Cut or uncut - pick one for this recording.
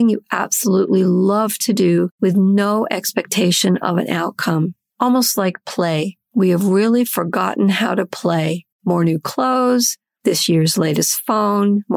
cut